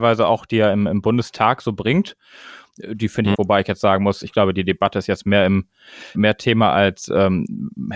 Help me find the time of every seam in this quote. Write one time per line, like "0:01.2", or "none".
0:03.3
0:06.1